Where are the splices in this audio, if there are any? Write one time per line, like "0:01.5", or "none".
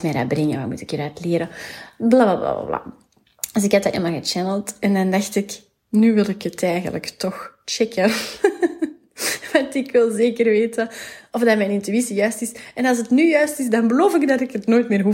none

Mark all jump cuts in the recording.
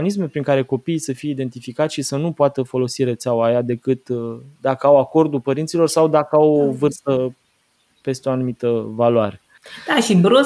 none

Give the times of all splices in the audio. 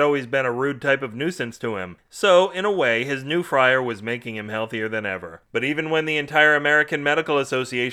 0:02.0

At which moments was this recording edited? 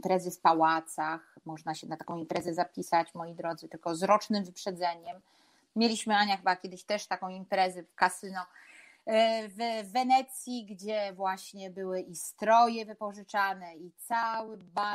none

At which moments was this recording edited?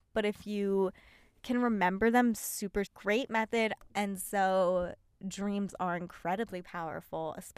0:02.9
0:03.9

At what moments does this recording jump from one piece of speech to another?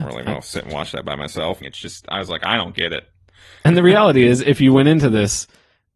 0:01.6

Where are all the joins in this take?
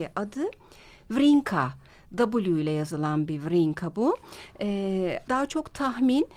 0:05.3

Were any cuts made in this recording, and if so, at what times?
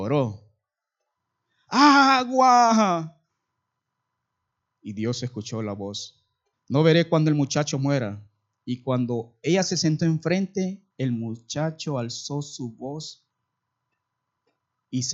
0:06.5
0:10.9

